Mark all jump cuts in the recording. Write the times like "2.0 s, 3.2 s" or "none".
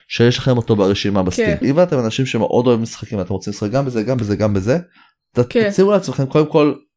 1.6 s